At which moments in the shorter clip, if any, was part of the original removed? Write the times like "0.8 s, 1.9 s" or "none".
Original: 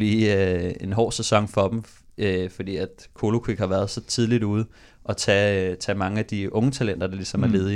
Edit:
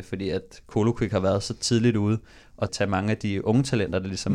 2.7 s